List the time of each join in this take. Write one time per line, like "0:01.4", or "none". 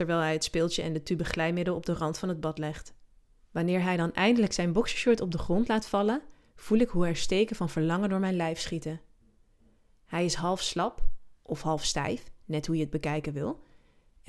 0:03.4